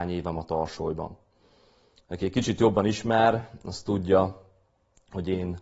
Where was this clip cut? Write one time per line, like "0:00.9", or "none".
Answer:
none

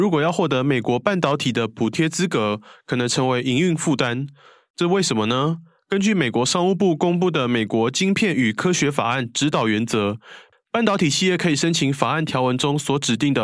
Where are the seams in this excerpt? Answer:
none

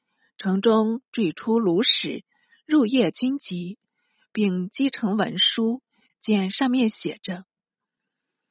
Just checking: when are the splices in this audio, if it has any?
0:06.1

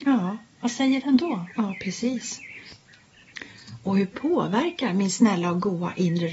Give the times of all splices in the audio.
0:04.1

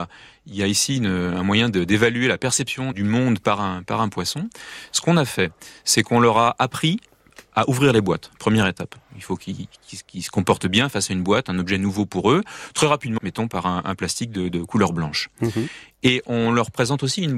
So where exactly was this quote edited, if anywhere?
0:02.9
0:13.2
0:14.5

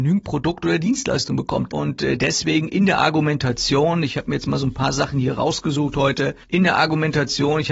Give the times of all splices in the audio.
0:01.7
0:06.4

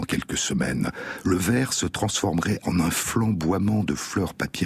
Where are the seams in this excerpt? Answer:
0:02.6

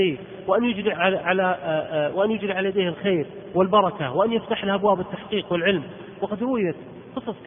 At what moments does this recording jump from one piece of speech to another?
0:00.9

